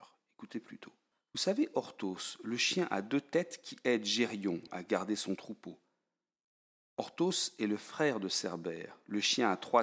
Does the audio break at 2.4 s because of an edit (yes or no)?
no